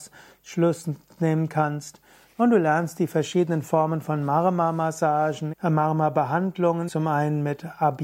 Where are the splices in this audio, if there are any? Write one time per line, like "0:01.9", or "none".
0:05.5
0:06.9